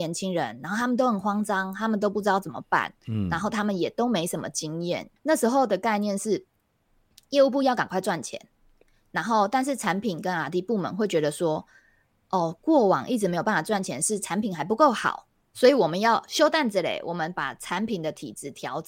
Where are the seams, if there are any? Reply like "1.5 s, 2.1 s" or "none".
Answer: 5.2 s